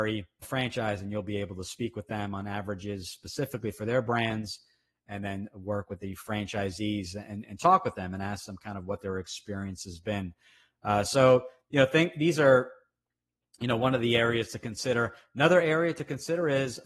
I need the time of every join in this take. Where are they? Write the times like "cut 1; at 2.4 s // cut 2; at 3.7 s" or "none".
none